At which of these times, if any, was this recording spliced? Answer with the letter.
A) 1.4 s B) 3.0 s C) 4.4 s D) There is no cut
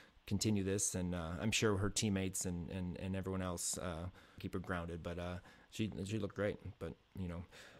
C